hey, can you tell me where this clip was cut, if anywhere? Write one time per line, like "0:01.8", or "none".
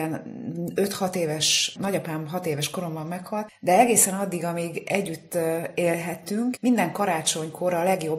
0:01.8
0:06.6